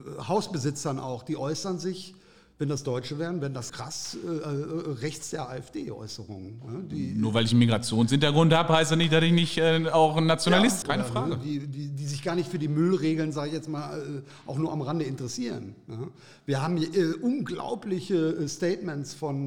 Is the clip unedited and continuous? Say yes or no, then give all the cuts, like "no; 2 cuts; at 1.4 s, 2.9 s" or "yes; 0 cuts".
no; 2 cuts; at 3.7 s, 10.8 s